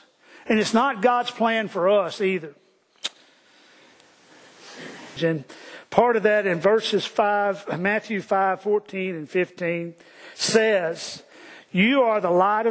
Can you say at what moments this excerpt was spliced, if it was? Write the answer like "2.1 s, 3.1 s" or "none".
5.2 s